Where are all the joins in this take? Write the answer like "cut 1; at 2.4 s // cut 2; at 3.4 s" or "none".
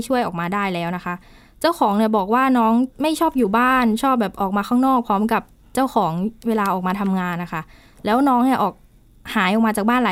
cut 1; at 2.9 s